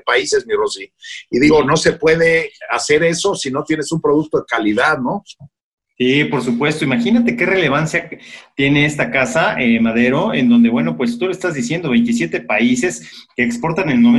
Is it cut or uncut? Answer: uncut